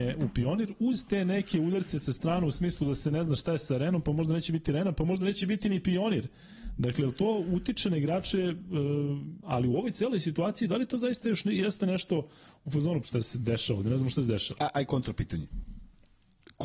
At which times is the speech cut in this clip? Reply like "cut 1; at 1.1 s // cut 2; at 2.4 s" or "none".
cut 1; at 9.4 s // cut 2; at 13.0 s